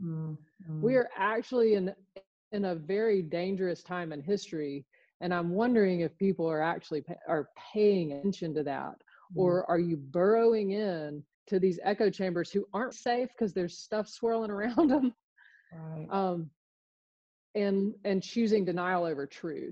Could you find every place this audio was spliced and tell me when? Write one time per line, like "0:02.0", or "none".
0:11.3
0:12.9